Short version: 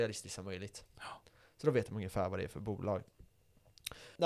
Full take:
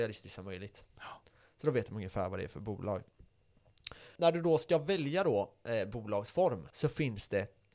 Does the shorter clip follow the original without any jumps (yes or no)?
yes